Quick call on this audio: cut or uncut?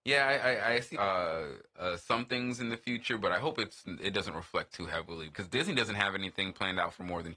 cut